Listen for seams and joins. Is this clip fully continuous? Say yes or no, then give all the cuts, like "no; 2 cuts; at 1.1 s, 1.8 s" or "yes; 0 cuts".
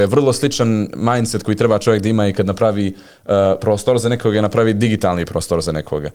yes; 0 cuts